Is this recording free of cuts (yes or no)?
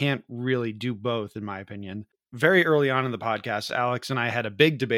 no